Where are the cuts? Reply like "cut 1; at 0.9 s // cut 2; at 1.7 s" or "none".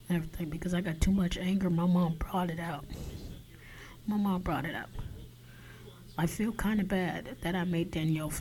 cut 1; at 4.0 s